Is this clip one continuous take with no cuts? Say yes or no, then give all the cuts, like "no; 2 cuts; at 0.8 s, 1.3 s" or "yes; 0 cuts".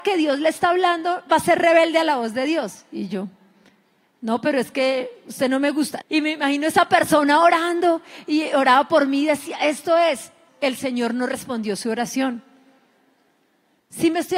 no; 2 cuts; at 6.0 s, 10.5 s